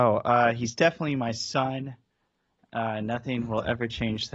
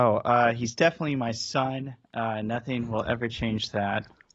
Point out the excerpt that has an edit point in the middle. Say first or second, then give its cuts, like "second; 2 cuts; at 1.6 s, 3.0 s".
second; 1 cut; at 2.0 s